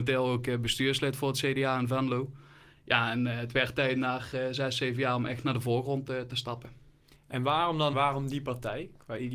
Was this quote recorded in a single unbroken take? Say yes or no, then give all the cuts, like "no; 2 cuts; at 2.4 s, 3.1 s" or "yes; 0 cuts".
no; 1 cut; at 7.9 s